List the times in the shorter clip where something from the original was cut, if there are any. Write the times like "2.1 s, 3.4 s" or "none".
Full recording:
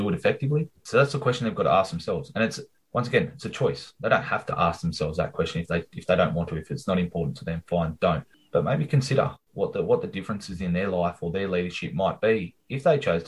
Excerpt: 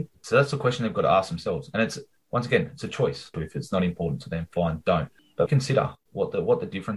3.3 s, 5.5 s